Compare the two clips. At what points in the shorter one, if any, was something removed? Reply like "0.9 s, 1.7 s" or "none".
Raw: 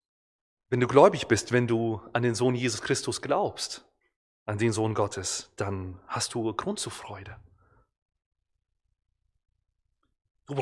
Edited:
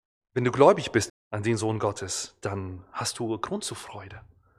1.1 s